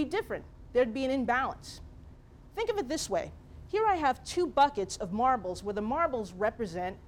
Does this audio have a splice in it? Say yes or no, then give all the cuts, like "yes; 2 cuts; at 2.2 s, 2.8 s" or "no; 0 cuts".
no; 0 cuts